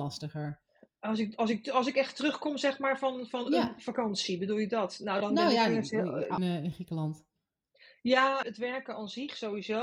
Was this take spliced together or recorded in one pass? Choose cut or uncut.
cut